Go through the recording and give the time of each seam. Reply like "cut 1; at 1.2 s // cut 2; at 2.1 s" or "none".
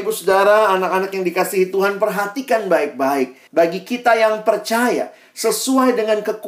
cut 1; at 3.5 s